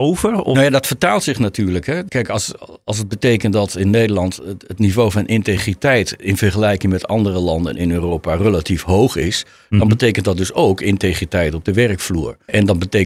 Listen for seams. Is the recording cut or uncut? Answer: uncut